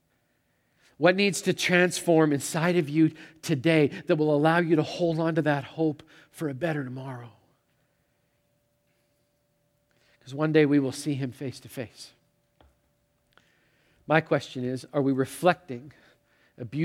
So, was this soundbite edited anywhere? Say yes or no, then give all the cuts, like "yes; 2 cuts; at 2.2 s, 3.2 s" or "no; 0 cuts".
no; 0 cuts